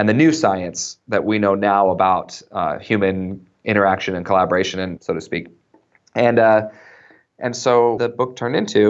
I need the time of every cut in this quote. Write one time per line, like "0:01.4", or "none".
0:05.0
0:08.0